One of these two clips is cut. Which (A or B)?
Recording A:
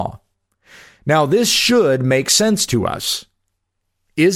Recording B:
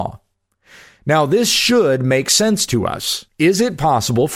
B